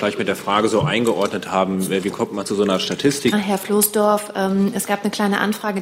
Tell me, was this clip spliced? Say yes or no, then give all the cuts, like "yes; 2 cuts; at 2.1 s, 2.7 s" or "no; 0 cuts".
yes; 1 cut; at 3.3 s